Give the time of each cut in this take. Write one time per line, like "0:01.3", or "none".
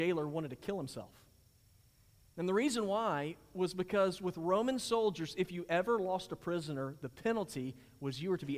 none